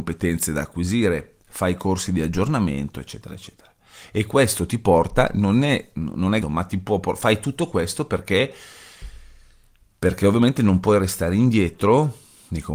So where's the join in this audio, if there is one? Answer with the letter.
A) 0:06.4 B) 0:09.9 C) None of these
A